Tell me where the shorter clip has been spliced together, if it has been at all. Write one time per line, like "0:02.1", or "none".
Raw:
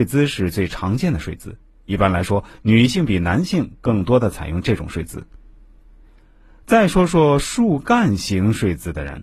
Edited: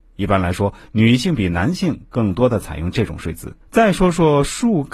0:03.6

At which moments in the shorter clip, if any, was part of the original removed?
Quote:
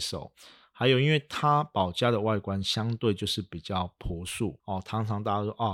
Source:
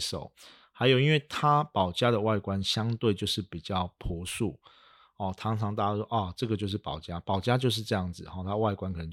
0:04.6

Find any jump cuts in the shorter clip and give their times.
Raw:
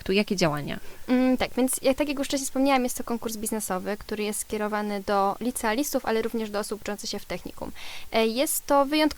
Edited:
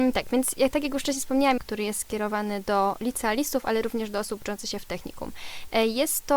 0:01.6

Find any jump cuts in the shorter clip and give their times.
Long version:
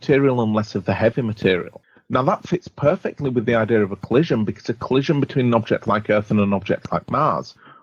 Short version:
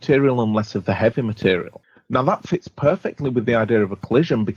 none

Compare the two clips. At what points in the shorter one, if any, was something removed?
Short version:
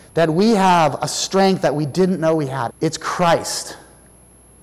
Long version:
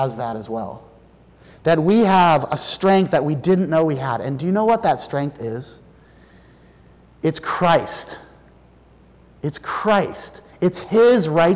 0:02.7

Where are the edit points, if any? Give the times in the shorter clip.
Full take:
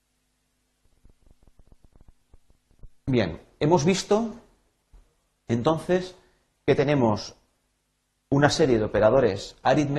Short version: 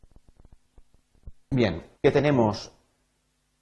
0:01.9

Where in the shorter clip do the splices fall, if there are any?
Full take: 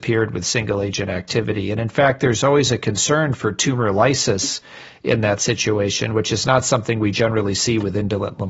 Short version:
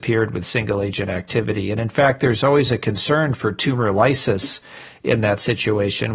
none

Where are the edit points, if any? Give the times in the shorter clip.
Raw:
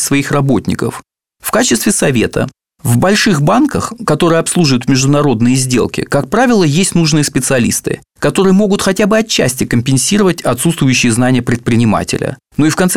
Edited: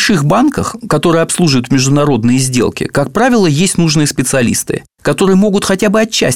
none

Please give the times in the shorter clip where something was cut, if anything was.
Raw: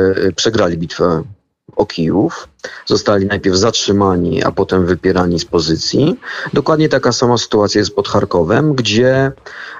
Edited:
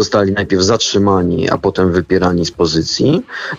none

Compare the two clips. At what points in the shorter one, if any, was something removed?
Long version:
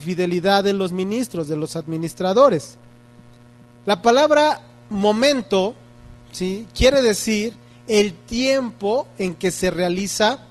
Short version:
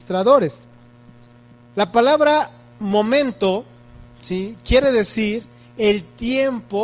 none

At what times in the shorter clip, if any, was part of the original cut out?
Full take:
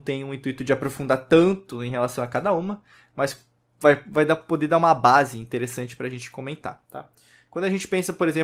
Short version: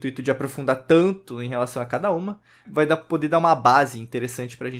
0:02.6

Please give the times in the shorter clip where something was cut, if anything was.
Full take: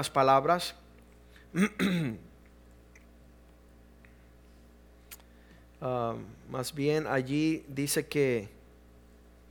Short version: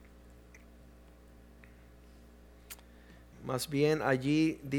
0:03.3

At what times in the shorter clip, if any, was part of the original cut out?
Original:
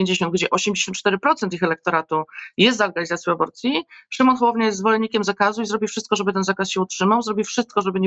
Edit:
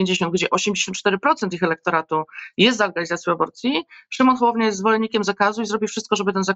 none

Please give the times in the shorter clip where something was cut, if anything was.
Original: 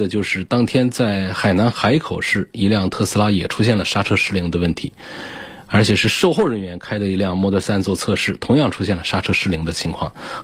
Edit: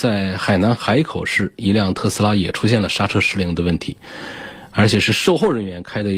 none

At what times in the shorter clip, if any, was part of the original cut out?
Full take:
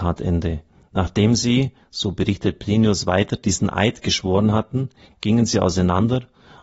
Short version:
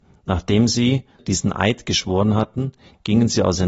0:01.2

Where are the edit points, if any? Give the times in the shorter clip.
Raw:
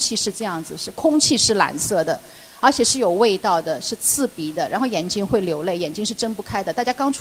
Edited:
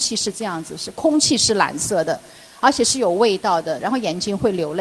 0:03.8

